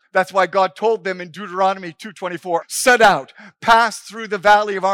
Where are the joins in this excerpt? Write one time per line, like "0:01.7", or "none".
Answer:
0:02.6